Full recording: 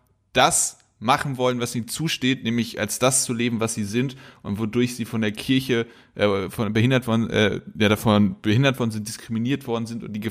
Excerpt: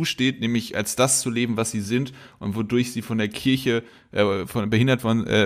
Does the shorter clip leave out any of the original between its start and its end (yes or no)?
no